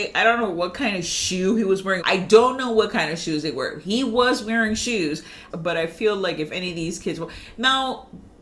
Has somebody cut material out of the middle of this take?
yes; 2 cuts; at 2.0 s, 5.5 s

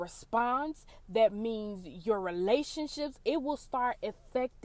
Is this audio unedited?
no; 1 cut; at 1.0 s

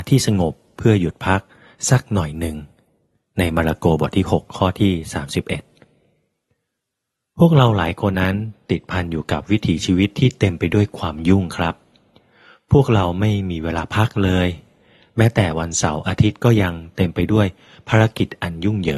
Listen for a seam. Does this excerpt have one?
yes; 1 cut; at 8.1 s

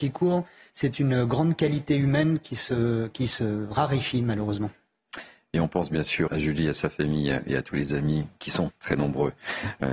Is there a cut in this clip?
yes; 2 cuts; at 6.3 s, 8.7 s

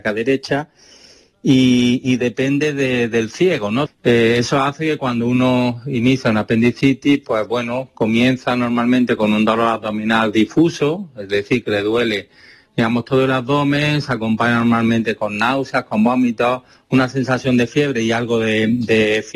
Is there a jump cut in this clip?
yes; 1 cut; at 3.9 s

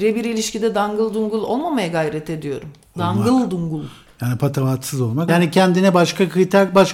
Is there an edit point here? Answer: yes; 2 cuts; at 2.9 s, 5.3 s

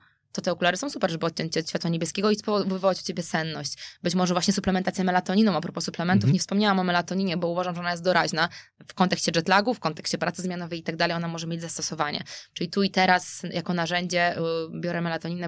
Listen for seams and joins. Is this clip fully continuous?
yes; 0 cuts

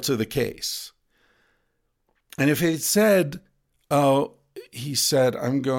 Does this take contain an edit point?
no; 0 cuts

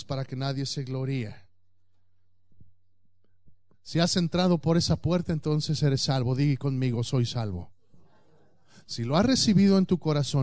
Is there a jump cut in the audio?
yes; 1 cut; at 3.7 s

